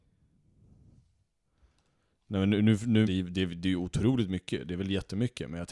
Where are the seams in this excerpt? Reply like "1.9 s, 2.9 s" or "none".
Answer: 3.0 s